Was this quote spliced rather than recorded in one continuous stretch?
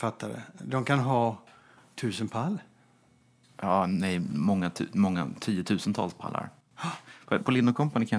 no; 0 cuts

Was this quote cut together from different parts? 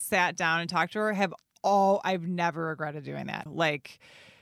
yes; 1 cut; at 3.5 s

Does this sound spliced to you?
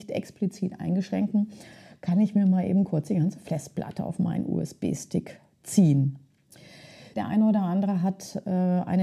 yes; 1 cut; at 7.1 s

